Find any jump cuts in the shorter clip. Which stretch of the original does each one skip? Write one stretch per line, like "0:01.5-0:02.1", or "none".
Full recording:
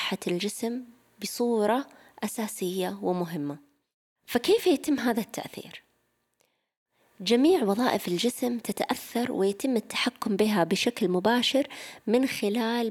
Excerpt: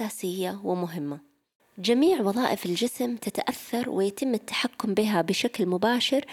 0:04.0-0:07.0